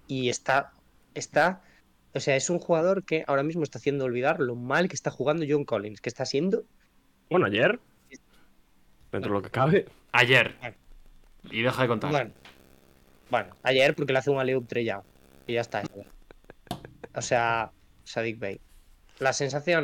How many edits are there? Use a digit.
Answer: 2